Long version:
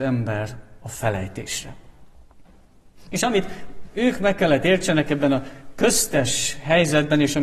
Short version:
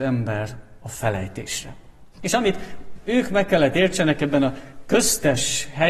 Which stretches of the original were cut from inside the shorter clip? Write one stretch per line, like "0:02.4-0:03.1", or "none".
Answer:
0:02.1-0:03.0